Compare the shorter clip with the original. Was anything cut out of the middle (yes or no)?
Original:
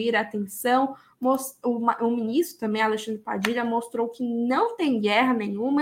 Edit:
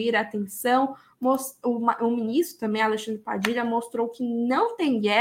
no